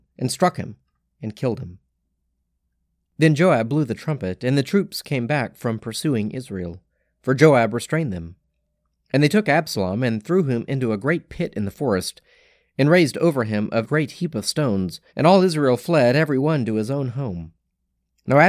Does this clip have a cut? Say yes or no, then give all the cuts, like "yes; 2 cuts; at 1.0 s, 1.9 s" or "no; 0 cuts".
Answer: yes; 2 cuts; at 13.8 s, 15.1 s